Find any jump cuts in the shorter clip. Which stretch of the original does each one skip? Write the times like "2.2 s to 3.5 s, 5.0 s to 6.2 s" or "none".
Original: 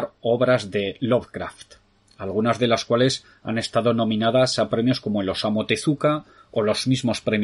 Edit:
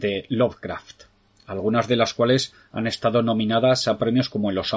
none